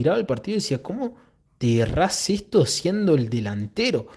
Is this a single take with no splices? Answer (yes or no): yes